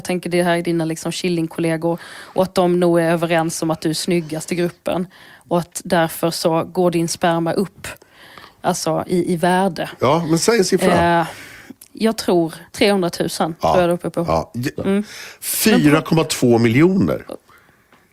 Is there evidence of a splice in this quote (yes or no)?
yes